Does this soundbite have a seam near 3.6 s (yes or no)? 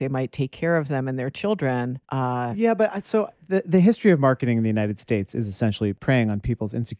no